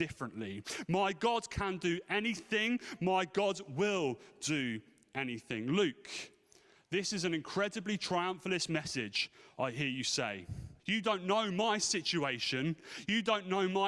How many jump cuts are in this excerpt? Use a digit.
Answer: 1